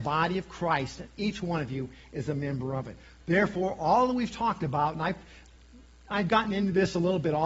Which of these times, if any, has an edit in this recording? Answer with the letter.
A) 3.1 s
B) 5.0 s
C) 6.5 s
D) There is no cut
D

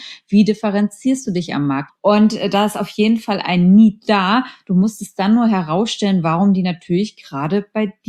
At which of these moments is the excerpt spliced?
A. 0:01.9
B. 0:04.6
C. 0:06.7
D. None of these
A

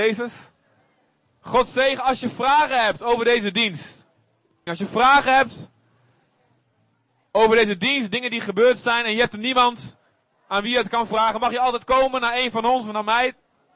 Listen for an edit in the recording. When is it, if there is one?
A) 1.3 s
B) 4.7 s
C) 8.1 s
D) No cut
B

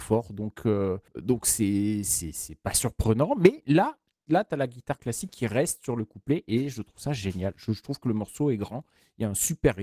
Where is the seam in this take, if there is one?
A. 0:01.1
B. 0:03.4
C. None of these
A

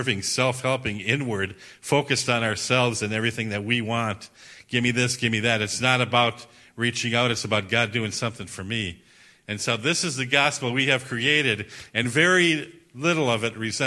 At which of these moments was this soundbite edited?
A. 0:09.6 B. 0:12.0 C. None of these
C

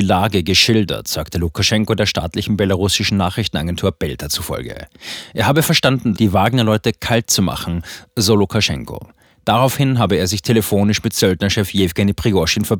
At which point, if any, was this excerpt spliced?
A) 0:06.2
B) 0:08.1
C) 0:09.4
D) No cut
A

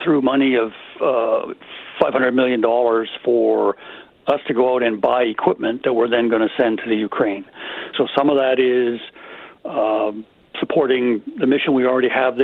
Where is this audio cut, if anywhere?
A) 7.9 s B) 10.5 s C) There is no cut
A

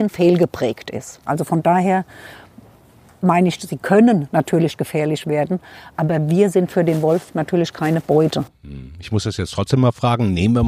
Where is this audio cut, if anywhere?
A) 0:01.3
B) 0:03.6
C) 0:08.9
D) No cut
A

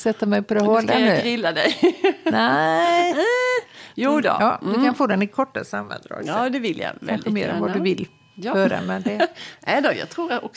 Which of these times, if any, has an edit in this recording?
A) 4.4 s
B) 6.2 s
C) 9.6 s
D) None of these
A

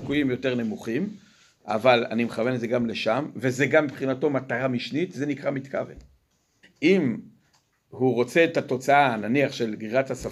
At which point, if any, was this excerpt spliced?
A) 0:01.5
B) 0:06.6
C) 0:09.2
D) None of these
B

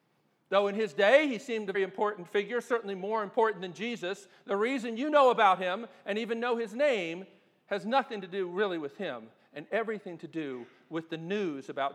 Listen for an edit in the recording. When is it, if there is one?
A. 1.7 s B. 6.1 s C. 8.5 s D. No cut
A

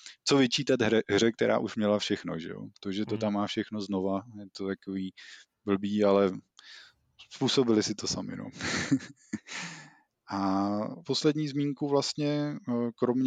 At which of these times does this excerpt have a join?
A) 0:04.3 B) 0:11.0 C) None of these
B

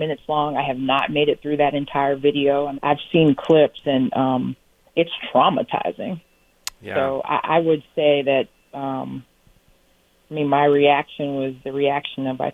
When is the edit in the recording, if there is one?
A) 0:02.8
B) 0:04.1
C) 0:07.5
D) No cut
A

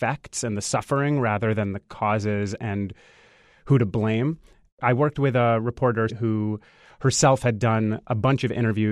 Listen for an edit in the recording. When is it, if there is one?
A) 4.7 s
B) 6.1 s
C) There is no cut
B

